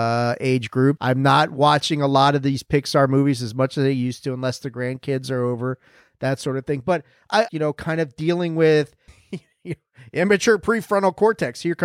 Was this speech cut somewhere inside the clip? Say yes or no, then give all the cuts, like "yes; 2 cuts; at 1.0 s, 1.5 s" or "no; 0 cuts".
yes; 2 cuts; at 1.0 s, 7.5 s